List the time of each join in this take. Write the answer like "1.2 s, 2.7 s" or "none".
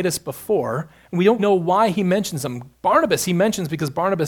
1.4 s

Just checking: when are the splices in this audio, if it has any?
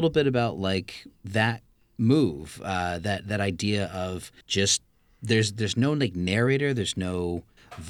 4.4 s

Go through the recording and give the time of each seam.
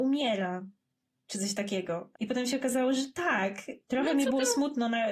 2.1 s, 3.8 s

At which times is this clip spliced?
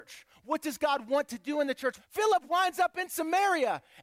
2.0 s

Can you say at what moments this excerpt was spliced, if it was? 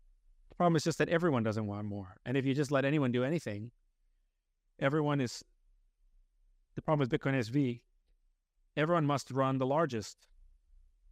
none

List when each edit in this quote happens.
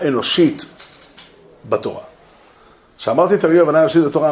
none

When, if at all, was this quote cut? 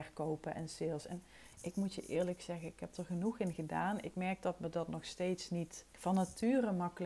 5.9 s

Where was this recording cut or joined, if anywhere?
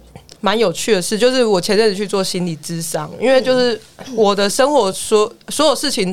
none

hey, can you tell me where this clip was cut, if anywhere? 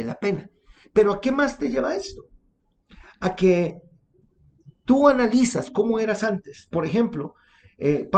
none

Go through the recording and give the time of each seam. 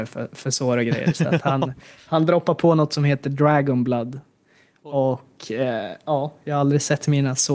none

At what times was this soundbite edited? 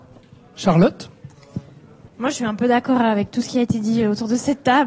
none

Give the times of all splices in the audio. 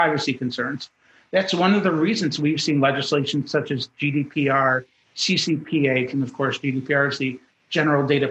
6.1 s

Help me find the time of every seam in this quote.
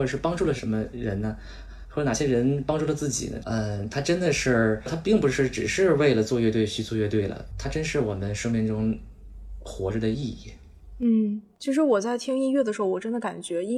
3.4 s, 4.9 s, 7.5 s

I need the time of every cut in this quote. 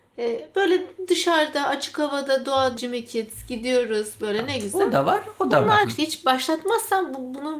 2.8 s, 5.8 s

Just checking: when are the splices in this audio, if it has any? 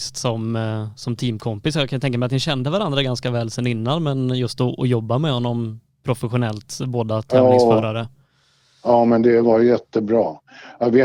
none

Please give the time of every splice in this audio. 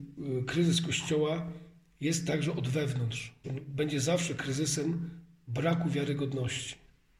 3.4 s

